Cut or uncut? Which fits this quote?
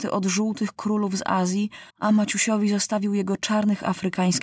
cut